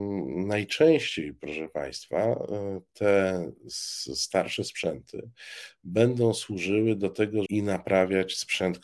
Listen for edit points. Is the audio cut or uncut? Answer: cut